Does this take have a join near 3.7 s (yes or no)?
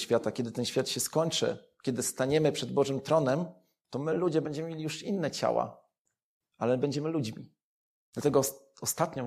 no